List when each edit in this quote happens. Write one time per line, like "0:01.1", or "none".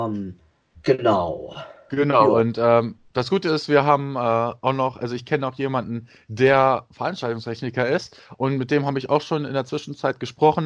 none